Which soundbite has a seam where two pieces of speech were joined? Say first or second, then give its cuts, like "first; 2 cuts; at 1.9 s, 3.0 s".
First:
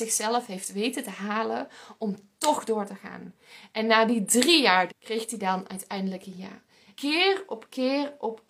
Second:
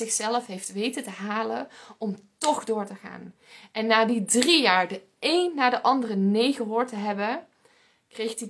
first; 2 cuts; at 4.9 s, 6.9 s